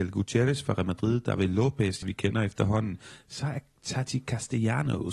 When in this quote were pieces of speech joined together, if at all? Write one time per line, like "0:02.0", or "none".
0:02.0